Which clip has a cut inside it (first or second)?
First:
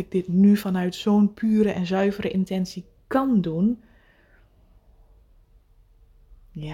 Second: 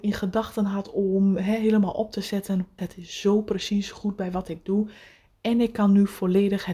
second